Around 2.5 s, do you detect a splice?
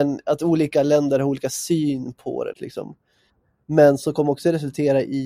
yes; 1 cut; at 2.5 s

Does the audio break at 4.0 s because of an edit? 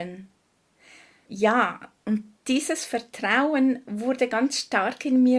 no; 1 cut; at 1.3 s

